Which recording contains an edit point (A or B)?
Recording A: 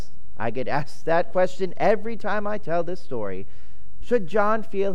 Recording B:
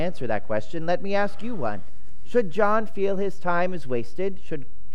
A